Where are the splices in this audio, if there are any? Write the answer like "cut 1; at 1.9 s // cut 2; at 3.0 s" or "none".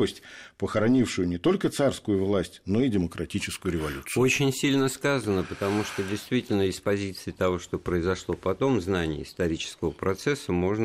none